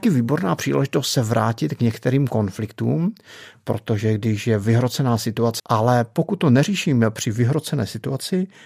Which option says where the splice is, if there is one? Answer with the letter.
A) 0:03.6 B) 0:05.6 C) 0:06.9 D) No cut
B